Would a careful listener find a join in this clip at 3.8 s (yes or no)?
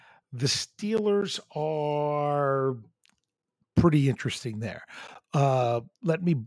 no